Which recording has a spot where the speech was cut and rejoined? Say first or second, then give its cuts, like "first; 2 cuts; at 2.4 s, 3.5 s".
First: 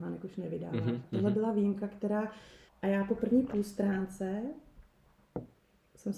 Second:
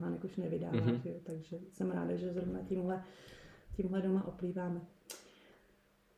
first; 2 cuts; at 1.0 s, 2.7 s